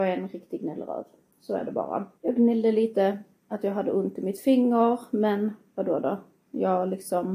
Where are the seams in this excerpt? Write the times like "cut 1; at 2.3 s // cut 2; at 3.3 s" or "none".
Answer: cut 1; at 2.2 s